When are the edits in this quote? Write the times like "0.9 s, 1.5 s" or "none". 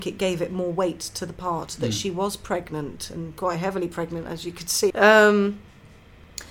4.9 s